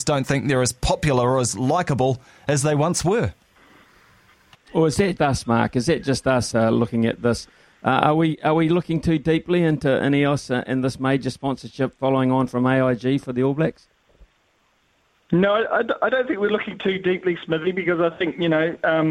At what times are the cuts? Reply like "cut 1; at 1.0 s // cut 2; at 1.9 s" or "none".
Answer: cut 1; at 5.2 s // cut 2; at 6.5 s

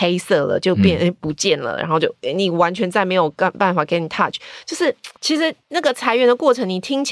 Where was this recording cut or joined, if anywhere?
cut 1; at 5.2 s

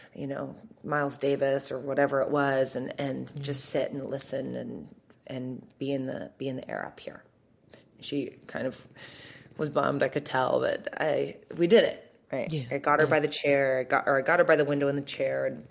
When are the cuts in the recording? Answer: none

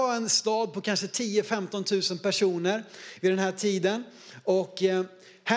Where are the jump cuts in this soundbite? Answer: none

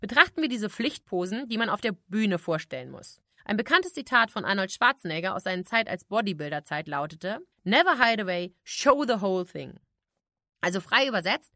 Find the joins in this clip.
cut 1; at 3.3 s // cut 2; at 7.5 s

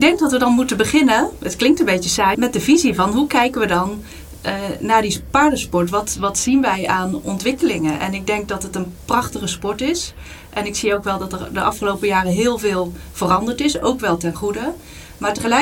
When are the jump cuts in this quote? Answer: cut 1; at 2.3 s

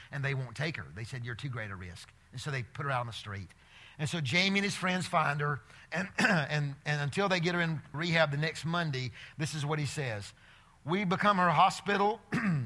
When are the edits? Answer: cut 1; at 7.9 s

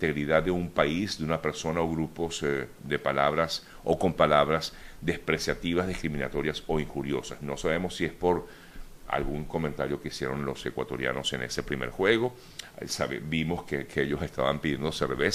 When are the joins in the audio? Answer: none

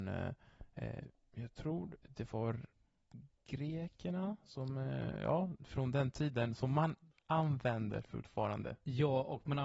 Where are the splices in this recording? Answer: none

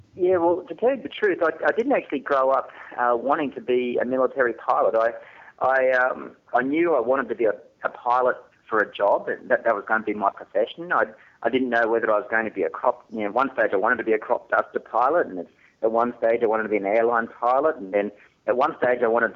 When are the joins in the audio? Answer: none

